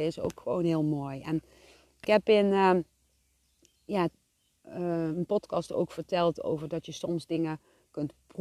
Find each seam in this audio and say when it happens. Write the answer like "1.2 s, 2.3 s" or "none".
none